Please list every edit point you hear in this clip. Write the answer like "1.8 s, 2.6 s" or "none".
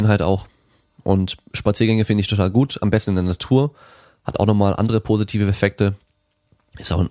none